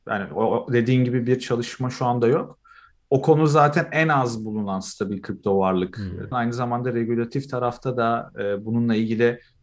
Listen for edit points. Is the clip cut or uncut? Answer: cut